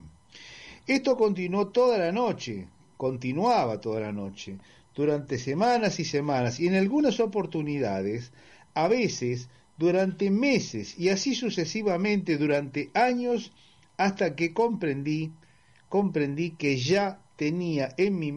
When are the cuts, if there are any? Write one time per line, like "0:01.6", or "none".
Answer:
none